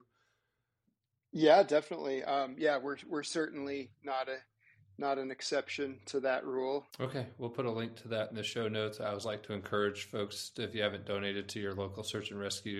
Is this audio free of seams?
no; 1 cut; at 6.9 s

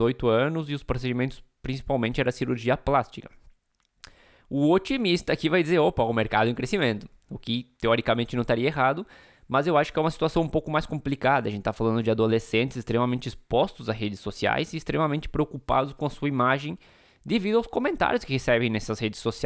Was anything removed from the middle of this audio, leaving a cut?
no; 0 cuts

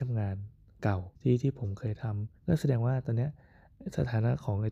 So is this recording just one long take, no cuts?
no; 2 cuts; at 1.2 s, 2.4 s

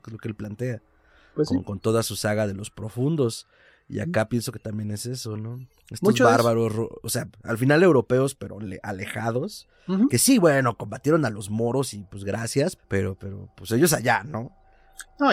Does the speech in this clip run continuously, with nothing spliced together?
no; 1 cut; at 12.8 s

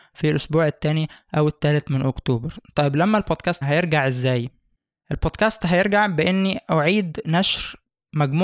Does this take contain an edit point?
yes; 1 cut; at 3.6 s

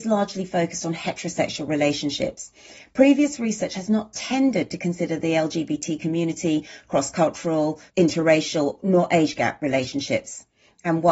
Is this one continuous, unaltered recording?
no; 1 cut; at 7.9 s

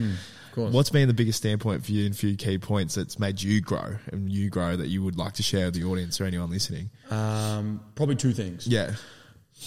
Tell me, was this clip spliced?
no; 0 cuts

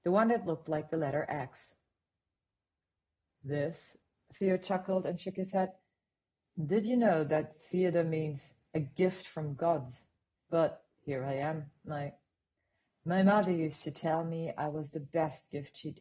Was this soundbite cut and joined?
yes; 1 cut; at 10.4 s

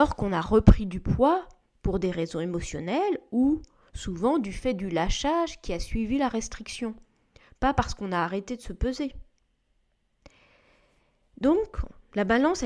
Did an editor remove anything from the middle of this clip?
no; 0 cuts

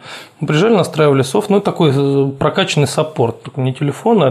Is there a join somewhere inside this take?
no; 0 cuts

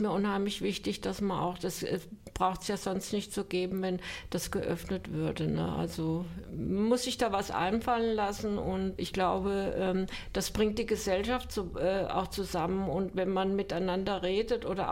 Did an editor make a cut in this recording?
yes; 1 cut; at 9.0 s

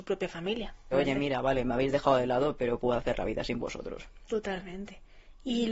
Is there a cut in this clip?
yes; 1 cut; at 0.9 s

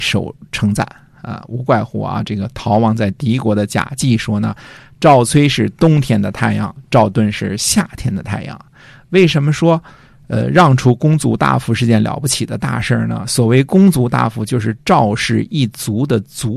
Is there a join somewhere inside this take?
no; 0 cuts

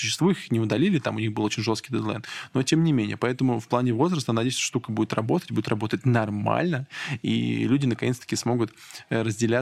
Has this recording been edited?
no; 0 cuts

